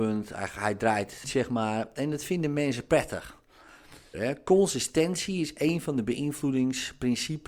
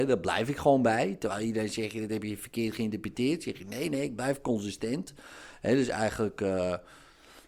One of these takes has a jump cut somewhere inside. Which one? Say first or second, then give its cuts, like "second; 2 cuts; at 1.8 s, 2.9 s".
first; 2 cuts; at 1.2 s, 4.1 s